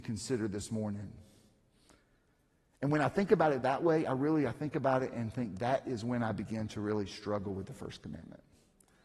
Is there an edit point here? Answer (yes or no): no